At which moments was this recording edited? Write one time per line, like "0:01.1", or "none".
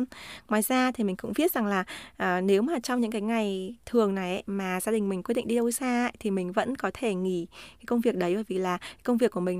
none

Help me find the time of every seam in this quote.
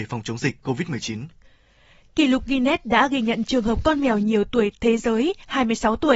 none

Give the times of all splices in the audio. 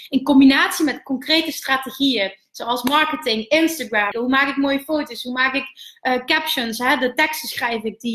0:04.1

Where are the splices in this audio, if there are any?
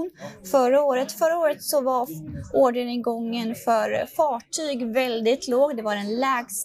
0:01.1

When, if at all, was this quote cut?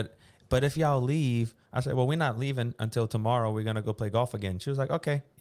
0:01.7

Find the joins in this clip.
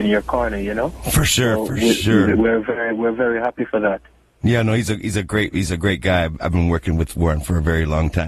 none

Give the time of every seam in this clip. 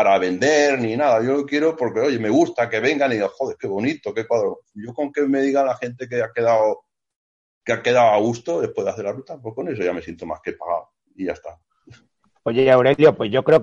0:04.6

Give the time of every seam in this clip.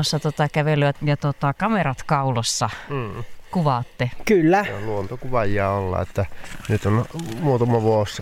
0:00.9

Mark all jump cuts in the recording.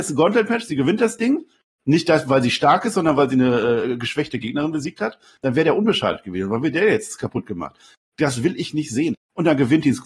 0:05.4
0:09.1

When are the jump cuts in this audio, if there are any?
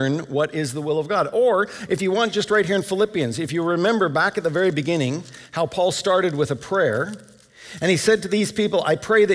none

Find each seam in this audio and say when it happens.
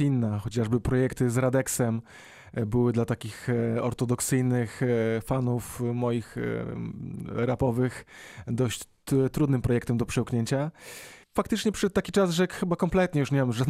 0:11.2

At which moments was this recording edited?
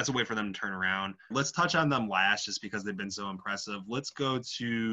0:01.3

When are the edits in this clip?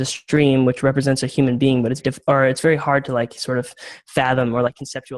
0:02.0

